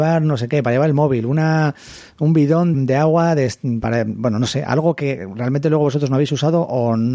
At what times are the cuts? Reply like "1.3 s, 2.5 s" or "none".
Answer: 2.7 s